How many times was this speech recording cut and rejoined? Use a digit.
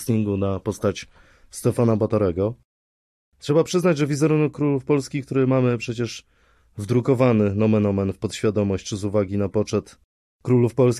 0